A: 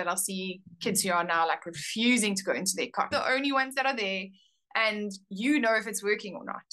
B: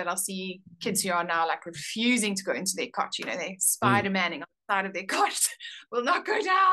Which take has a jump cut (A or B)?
A